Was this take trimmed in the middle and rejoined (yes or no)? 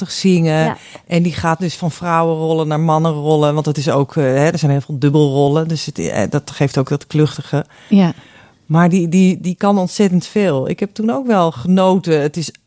no